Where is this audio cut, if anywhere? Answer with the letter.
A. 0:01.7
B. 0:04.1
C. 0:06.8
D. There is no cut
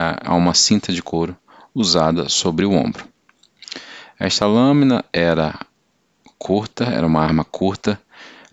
D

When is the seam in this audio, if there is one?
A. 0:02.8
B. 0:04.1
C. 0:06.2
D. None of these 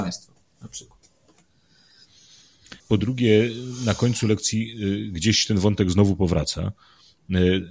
A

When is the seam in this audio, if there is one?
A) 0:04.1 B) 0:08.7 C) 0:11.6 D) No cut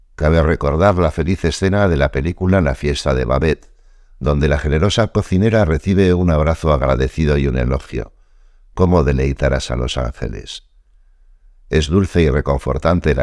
D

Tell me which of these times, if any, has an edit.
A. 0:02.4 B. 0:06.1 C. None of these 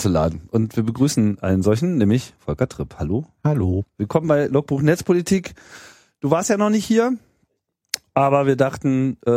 A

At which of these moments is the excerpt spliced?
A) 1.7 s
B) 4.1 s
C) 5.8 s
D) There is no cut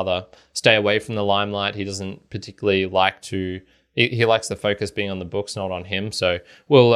D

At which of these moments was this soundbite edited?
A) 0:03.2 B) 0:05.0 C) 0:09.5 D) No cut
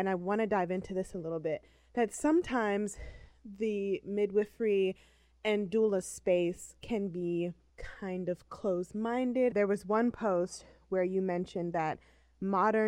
C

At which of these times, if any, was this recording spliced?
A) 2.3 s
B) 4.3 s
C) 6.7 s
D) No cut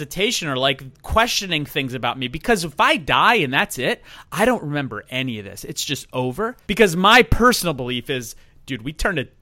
C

